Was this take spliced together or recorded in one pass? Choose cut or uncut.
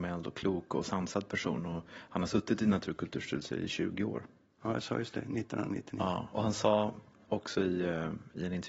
uncut